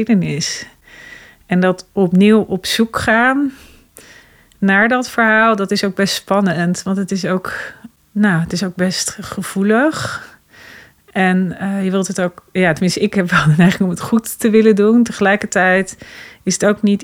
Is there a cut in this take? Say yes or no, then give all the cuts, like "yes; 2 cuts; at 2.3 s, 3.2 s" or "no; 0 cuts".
no; 0 cuts